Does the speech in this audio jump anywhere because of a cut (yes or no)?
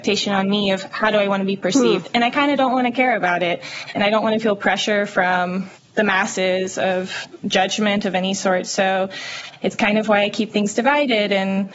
no